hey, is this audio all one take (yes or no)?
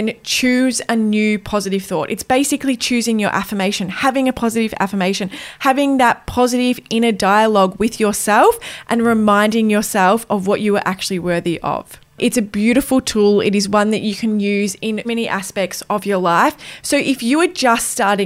no